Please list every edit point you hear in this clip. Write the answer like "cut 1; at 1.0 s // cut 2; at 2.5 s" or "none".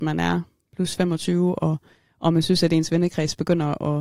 none